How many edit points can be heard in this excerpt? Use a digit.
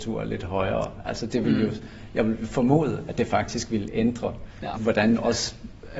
1